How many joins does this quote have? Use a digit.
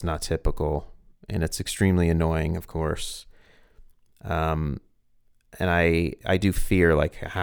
0